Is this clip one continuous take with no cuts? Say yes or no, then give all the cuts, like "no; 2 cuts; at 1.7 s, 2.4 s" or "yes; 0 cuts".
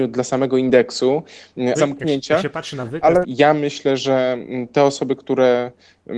no; 2 cuts; at 1.7 s, 3.2 s